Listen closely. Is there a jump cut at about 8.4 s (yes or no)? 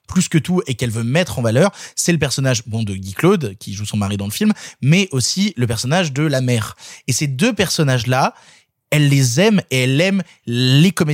no